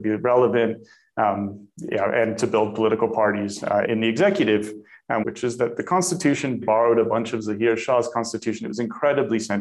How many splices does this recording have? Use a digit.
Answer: 3